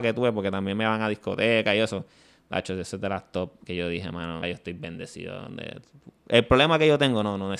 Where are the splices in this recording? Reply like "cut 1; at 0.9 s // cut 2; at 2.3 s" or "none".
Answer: cut 1; at 4.4 s

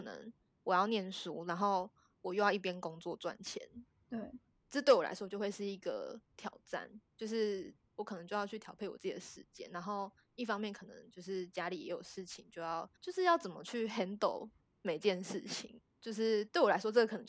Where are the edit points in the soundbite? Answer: cut 1; at 13.0 s // cut 2; at 15.8 s

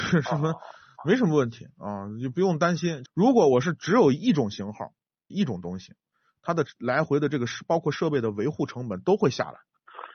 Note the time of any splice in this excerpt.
cut 1; at 3.1 s // cut 2; at 5.3 s

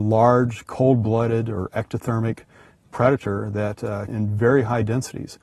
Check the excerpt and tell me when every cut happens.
cut 1; at 4.1 s

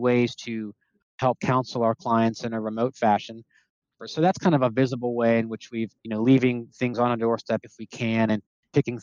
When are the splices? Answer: cut 1; at 4.0 s // cut 2; at 6.0 s

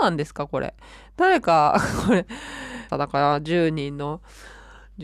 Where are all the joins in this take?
cut 1; at 2.9 s

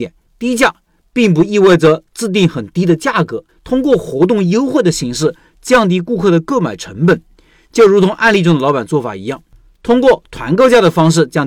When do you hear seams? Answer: cut 1; at 3.5 s

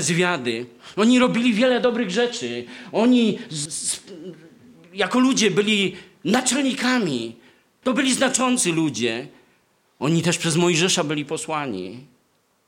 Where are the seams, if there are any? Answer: cut 1; at 3.7 s // cut 2; at 7.8 s

